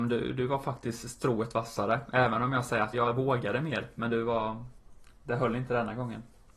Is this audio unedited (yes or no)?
no